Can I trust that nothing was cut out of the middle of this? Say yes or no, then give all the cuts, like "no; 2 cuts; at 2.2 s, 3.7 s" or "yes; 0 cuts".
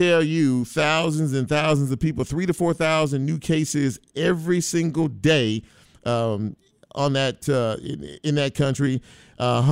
yes; 0 cuts